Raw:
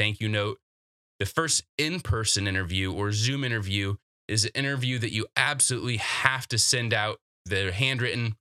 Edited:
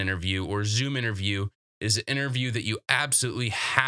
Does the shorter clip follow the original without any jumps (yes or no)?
yes